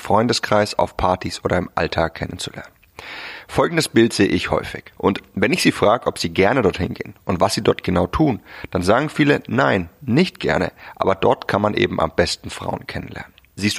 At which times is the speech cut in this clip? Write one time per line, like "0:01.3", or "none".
0:05.0